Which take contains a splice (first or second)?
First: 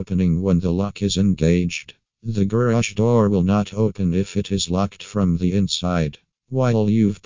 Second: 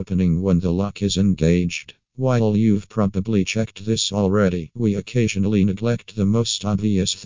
second